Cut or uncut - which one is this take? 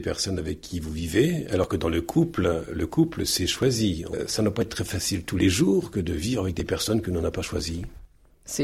uncut